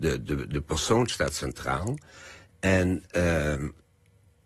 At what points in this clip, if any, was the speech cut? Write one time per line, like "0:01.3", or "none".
none